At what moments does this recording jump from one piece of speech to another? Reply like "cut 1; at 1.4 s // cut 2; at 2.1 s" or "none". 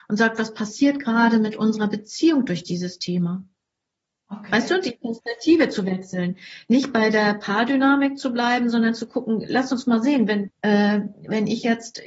cut 1; at 10.5 s

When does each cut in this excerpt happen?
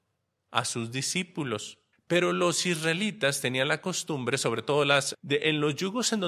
cut 1; at 1.9 s // cut 2; at 5.1 s

